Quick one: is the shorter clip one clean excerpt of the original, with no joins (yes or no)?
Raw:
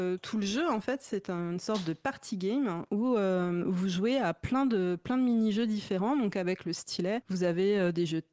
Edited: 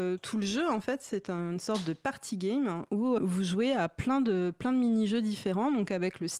no